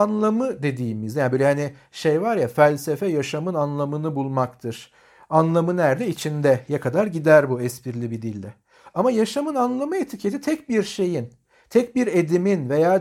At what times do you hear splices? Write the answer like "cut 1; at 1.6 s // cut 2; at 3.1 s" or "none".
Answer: none